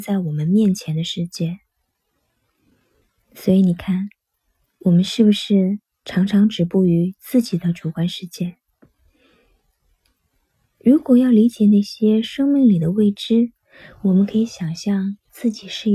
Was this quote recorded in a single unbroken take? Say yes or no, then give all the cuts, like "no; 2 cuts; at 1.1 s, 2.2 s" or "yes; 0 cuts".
yes; 0 cuts